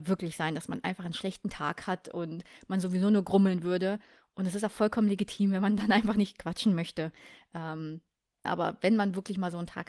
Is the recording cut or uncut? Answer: cut